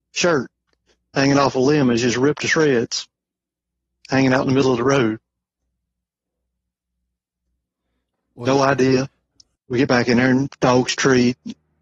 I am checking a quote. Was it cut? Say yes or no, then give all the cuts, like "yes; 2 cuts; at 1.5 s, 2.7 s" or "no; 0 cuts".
yes; 1 cut; at 9.6 s